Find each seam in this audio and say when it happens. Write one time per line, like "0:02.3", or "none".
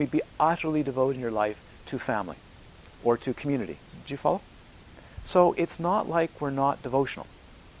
0:04.0